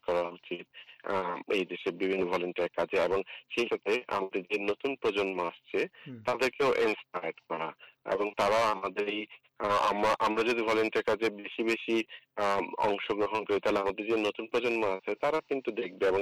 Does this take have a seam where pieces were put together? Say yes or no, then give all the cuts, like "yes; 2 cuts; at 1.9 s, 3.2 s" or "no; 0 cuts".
yes; 1 cut; at 3.7 s